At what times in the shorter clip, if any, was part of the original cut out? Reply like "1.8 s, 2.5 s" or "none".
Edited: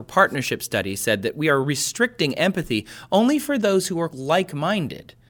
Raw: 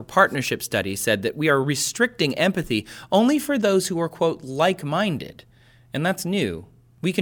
4.1 s